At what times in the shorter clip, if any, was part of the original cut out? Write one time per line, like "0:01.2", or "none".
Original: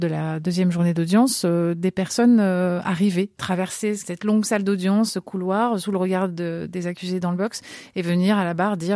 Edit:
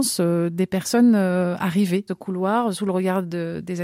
0:02.1

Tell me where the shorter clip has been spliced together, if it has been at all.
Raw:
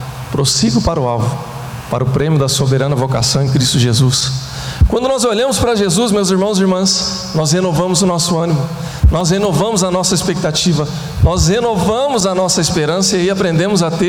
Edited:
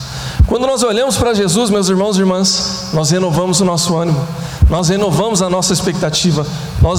none

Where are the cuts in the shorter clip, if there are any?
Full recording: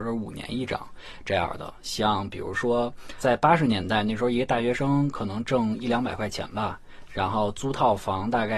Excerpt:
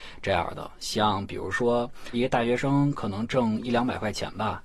0:02.1

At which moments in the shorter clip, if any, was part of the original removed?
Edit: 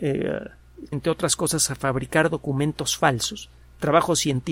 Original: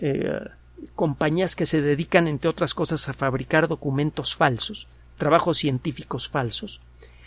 0:00.9

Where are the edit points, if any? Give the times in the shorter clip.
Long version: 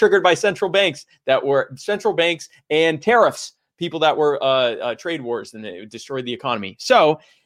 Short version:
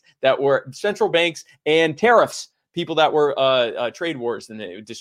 none

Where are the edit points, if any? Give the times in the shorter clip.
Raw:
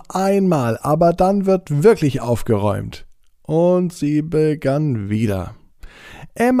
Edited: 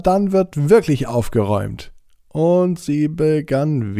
none

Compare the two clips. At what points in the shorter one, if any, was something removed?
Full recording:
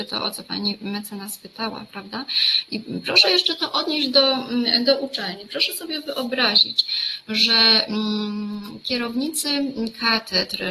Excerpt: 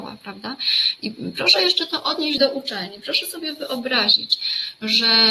0:02.4

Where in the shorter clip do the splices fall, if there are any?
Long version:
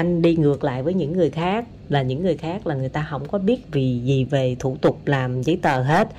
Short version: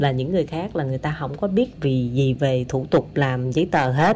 none

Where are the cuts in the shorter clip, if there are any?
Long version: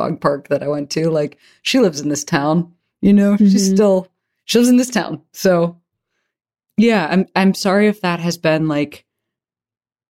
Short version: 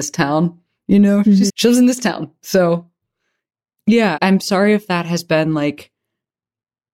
0:01.5
0:04.2

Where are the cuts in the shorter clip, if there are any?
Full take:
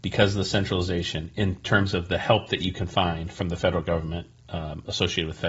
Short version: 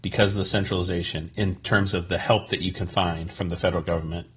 none

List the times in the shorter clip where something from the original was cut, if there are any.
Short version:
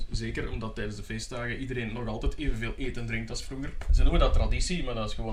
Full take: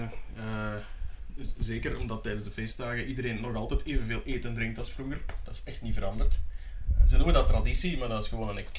0:03.9

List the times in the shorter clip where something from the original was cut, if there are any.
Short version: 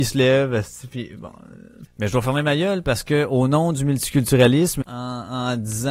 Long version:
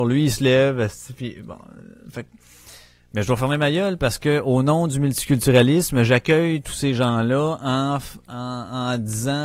0:01.8
0:04.8

